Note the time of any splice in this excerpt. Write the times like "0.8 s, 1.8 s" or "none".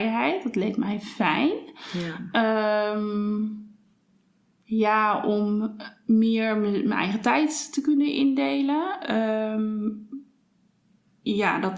none